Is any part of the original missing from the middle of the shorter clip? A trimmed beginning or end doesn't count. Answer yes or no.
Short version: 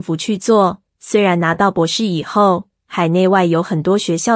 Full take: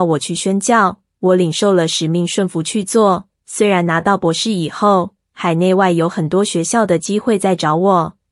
no